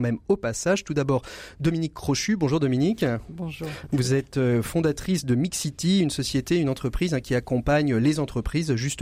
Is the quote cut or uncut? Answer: uncut